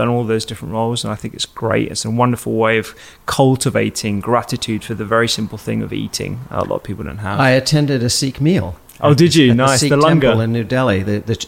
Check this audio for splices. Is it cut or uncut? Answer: uncut